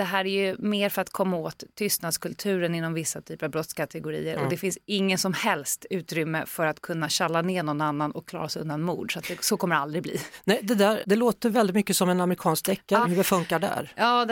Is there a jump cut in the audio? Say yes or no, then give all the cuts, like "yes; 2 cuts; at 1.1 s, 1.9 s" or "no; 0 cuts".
yes; 2 cuts; at 11.0 s, 13.0 s